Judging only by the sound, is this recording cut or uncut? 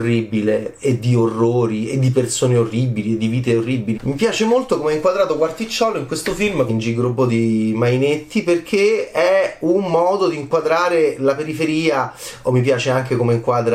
cut